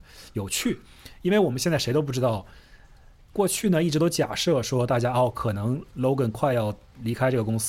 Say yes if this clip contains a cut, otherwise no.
no